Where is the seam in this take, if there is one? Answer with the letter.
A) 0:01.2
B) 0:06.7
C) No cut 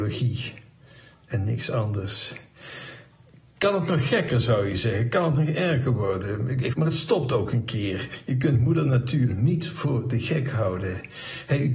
B